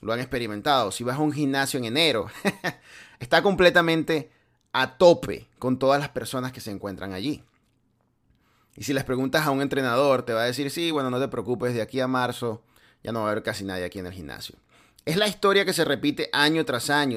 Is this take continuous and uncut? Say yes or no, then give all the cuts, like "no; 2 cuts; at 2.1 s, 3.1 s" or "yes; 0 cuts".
yes; 0 cuts